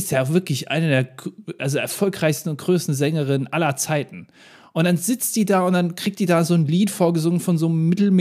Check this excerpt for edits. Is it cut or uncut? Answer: uncut